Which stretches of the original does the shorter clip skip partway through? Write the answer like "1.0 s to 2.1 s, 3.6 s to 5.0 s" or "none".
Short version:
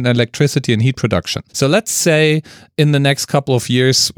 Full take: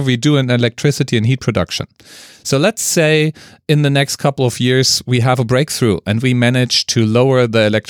1.9 s to 2.4 s